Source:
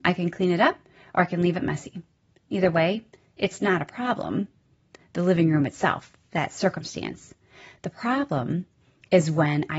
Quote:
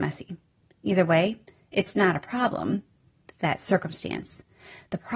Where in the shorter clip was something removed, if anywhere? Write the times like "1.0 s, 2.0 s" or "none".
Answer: 3.3 s